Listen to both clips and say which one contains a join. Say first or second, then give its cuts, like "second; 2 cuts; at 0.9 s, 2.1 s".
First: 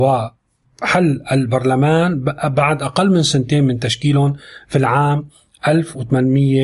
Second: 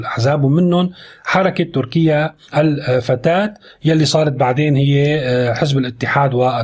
second; 1 cut; at 2.4 s